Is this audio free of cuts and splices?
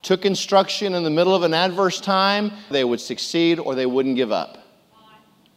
no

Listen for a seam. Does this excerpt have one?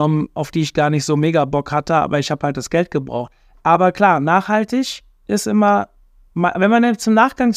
yes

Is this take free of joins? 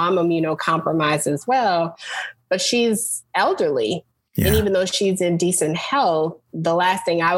yes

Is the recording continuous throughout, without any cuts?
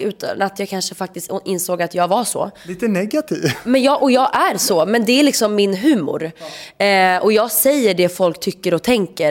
yes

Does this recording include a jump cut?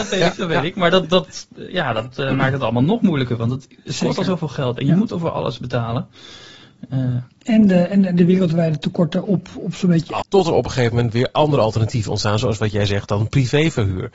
yes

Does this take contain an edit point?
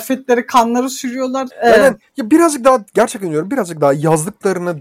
yes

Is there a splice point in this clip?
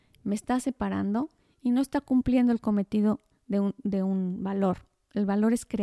no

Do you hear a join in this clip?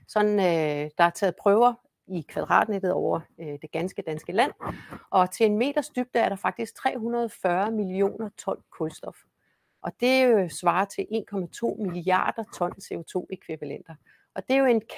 no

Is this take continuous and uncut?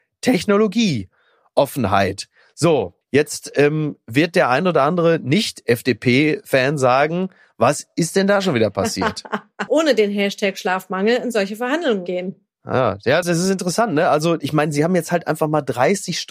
no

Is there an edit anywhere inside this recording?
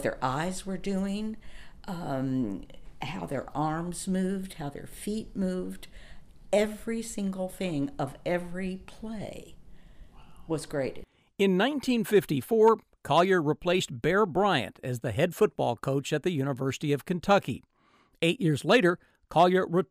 no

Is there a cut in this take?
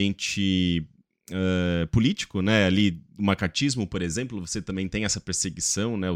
no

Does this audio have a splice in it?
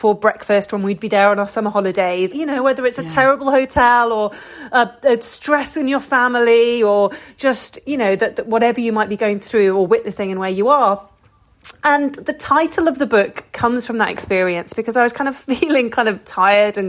yes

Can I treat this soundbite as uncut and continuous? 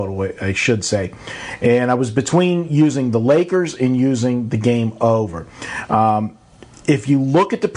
yes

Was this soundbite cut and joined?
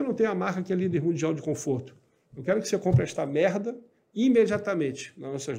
no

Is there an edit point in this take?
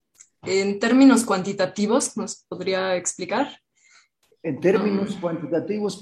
no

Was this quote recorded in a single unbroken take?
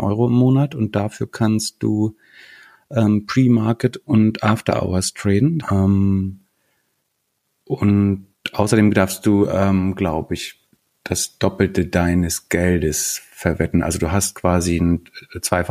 no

